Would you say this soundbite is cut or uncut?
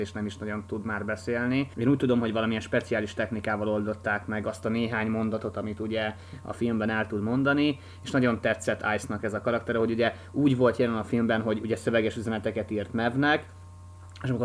uncut